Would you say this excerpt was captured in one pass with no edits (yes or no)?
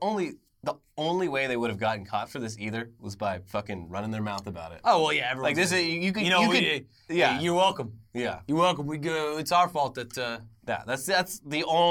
yes